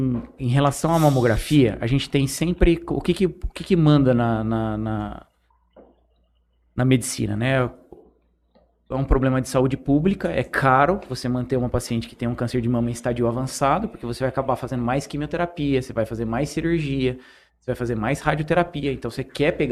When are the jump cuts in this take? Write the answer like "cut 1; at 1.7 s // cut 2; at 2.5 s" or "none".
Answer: cut 1; at 8.9 s